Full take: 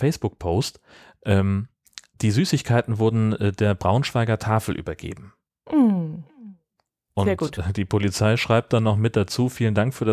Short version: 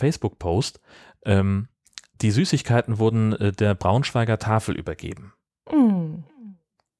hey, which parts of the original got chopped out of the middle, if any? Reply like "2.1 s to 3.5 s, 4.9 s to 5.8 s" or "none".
none